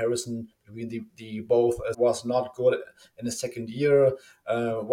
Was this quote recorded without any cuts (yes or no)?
no